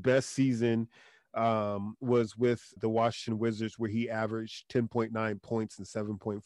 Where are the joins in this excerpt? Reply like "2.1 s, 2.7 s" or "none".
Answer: 2.8 s